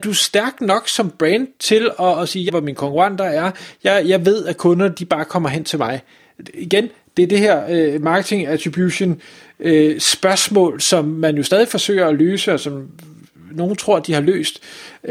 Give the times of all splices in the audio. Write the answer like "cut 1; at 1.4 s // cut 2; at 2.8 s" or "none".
cut 1; at 2.5 s // cut 2; at 6.4 s